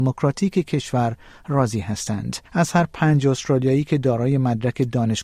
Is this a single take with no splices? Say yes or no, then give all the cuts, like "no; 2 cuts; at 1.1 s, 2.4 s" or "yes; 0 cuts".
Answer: no; 1 cut; at 2.5 s